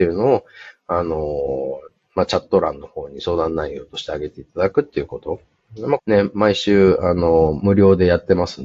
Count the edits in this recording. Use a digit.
1